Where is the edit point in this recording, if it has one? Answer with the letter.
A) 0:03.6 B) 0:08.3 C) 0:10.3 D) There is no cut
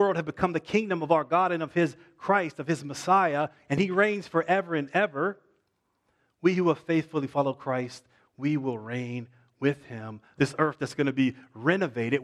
C